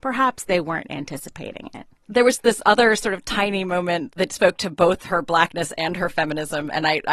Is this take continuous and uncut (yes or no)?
yes